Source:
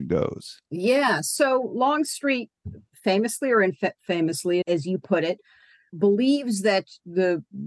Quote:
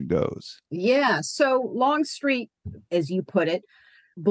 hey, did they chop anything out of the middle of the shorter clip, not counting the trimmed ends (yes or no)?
yes